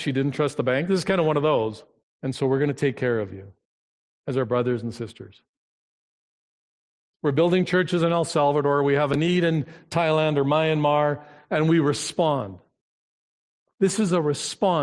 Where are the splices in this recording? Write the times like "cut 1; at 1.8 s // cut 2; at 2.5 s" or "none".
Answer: cut 1; at 2.0 s // cut 2; at 7.1 s